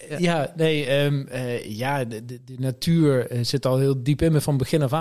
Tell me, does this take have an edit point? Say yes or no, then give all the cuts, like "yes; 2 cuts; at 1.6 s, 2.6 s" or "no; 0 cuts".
no; 0 cuts